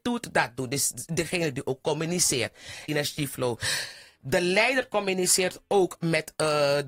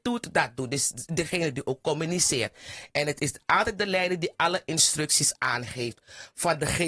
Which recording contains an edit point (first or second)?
first